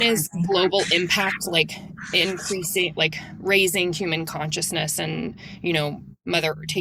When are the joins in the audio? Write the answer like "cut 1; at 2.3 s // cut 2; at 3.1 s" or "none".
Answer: none